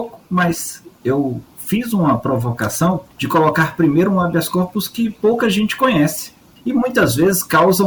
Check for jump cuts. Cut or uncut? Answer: cut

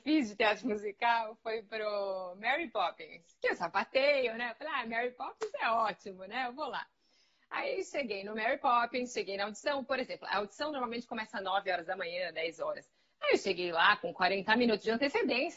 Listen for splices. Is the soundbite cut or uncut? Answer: uncut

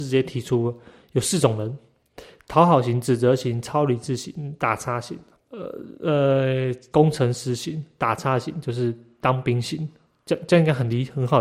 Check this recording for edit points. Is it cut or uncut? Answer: cut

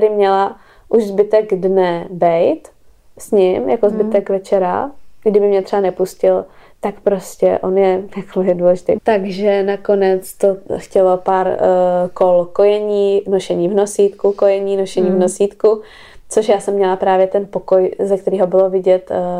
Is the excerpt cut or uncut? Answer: cut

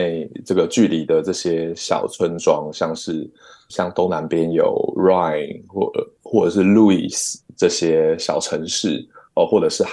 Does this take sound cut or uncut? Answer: uncut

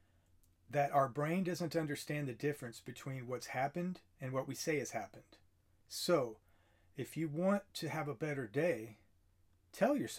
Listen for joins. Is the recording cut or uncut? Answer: uncut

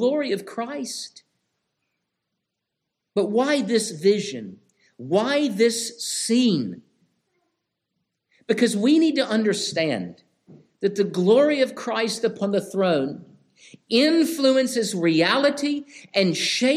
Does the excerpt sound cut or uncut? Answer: uncut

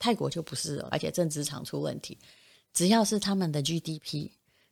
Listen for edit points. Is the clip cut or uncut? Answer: cut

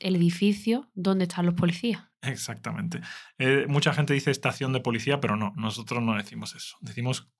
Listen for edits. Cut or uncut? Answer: uncut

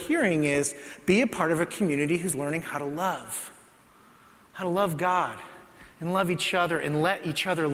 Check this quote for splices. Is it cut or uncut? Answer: uncut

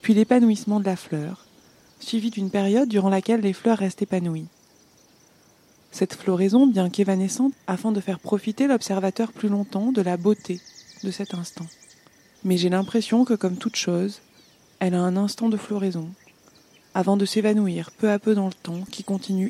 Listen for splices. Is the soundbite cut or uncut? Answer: cut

